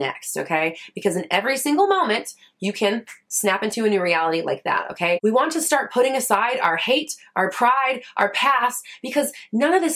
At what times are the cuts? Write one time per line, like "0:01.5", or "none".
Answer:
0:05.2

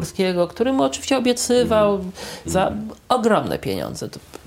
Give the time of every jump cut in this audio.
0:02.4

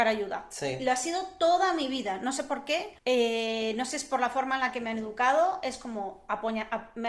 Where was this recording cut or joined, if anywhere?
0:03.0

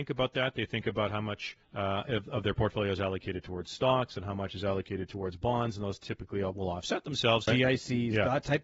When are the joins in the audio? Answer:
0:01.6
0:07.5

